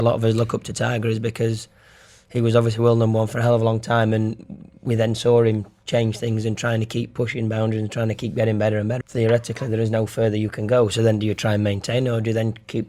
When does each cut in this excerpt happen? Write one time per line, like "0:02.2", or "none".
0:09.0